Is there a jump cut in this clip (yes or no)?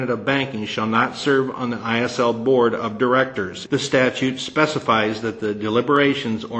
yes